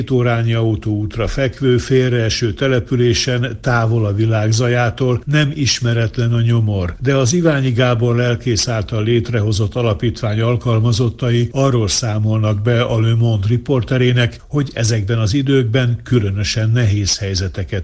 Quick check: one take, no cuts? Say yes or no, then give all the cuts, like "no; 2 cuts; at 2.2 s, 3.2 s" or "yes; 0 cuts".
yes; 0 cuts